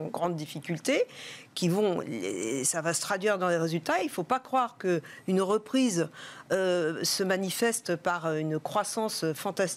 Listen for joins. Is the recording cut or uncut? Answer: uncut